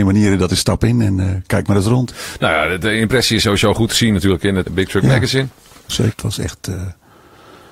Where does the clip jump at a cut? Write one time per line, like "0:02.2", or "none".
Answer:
0:04.7
0:06.1